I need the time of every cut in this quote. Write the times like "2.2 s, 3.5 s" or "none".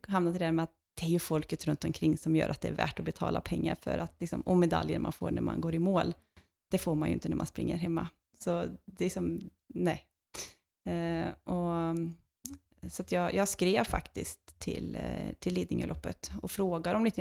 none